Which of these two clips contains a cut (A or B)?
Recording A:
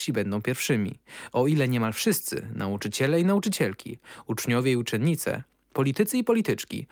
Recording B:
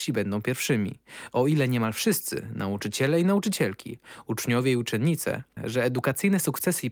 B